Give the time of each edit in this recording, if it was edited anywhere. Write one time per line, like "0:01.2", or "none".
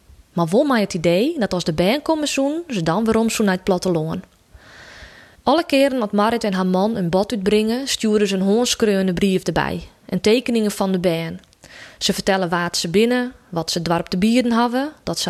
0:05.3